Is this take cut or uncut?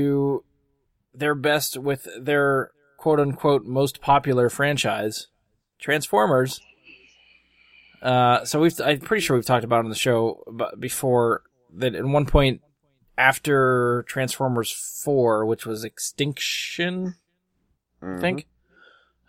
uncut